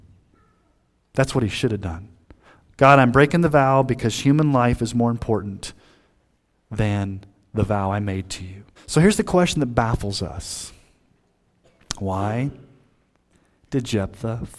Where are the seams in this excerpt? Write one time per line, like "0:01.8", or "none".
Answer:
0:08.8